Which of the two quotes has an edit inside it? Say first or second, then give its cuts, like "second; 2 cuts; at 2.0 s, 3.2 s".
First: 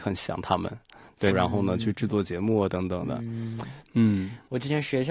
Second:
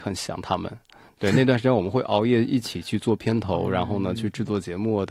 first; 2 cuts; at 1.3 s, 3.9 s